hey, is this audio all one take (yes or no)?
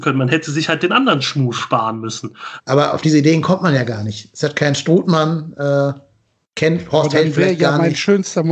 no